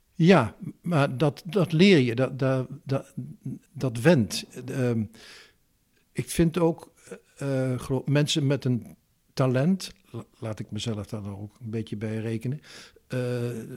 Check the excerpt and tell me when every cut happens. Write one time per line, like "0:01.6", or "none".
none